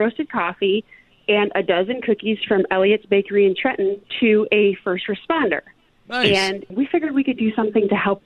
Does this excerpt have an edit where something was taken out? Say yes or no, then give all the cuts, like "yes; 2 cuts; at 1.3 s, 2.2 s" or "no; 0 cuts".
no; 0 cuts